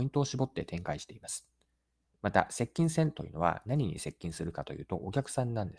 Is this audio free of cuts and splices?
yes; 0 cuts

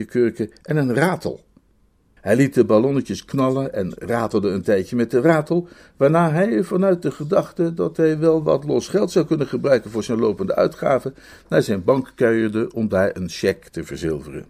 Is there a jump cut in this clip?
yes; 1 cut; at 2.2 s

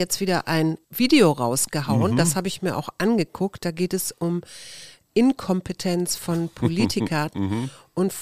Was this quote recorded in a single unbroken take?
yes; 0 cuts

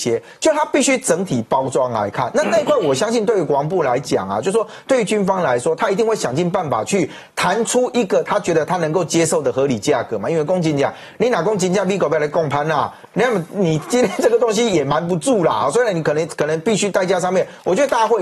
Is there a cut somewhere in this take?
no; 0 cuts

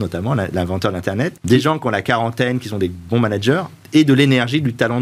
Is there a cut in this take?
yes; 1 cut; at 1.4 s

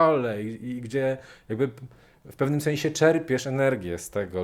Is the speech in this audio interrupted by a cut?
no; 0 cuts

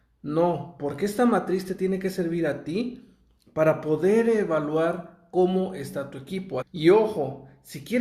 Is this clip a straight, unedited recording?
no; 1 cut; at 6.6 s

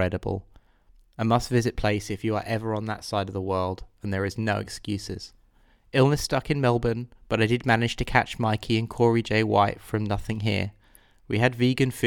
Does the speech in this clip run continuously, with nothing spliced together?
yes; 0 cuts

